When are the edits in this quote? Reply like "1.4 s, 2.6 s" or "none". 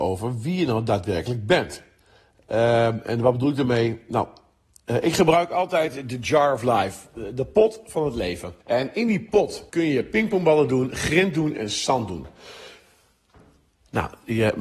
8.6 s, 9.7 s